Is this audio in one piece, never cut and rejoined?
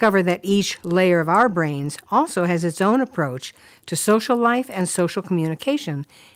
yes; 0 cuts

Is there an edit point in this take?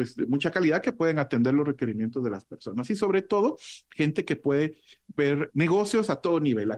yes; 1 cut; at 5.5 s

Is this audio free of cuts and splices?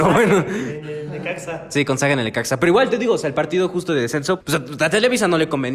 no; 1 cut; at 4.4 s

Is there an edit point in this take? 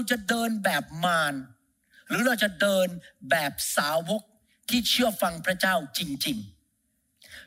no; 0 cuts

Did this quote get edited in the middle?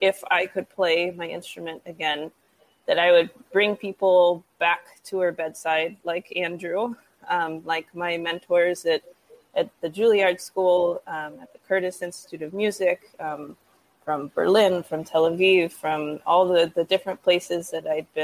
no; 0 cuts

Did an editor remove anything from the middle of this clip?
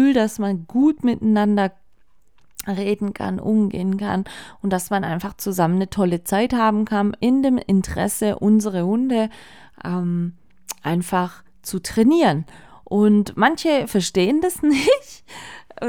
no; 0 cuts

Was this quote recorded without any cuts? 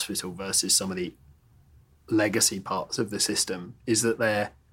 yes; 0 cuts

